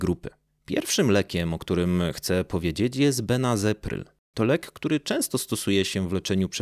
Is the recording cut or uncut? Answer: uncut